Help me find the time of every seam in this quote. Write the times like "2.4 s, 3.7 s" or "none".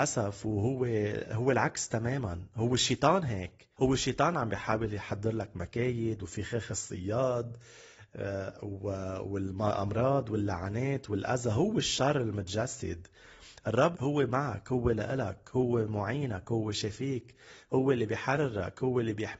3.7 s, 13.9 s